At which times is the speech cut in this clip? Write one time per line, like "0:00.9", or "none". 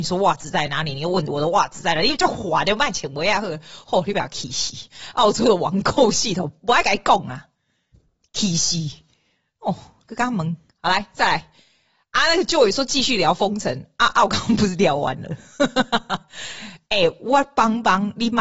none